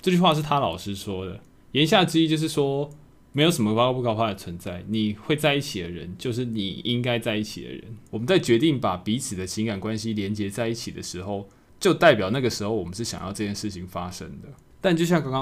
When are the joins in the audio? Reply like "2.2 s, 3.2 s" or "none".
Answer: none